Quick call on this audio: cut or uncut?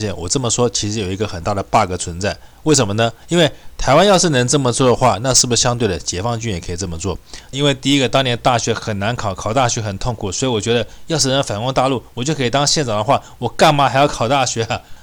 cut